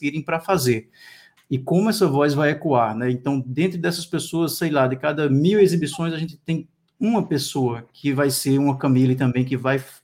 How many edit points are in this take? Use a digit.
1